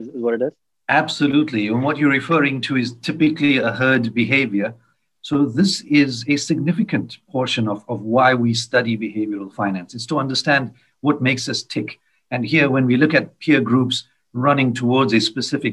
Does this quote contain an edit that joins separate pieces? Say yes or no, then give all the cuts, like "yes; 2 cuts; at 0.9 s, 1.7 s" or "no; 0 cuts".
no; 0 cuts